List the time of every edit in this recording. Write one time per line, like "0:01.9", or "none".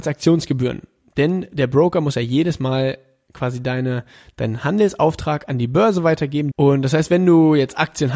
0:06.5